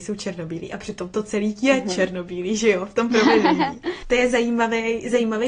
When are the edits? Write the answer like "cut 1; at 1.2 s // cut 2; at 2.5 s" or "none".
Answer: cut 1; at 4.0 s